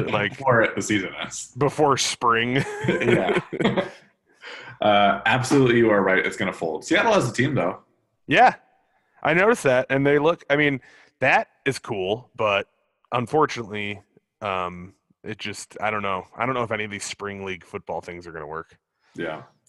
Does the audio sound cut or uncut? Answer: uncut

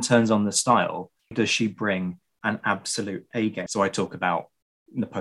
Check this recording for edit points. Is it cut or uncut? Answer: cut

